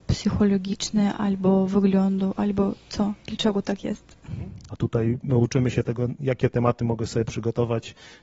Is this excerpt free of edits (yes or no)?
no